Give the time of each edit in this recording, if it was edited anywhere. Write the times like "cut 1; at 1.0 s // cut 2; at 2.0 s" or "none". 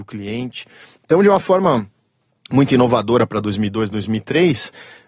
none